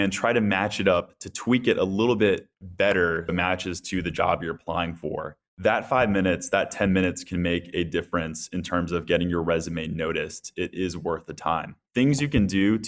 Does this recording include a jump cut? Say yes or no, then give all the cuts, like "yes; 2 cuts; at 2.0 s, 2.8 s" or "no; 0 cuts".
yes; 1 cut; at 3.3 s